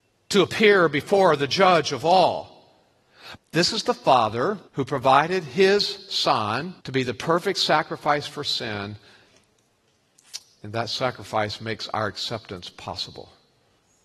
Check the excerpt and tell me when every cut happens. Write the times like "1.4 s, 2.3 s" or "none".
3.4 s, 4.7 s, 6.8 s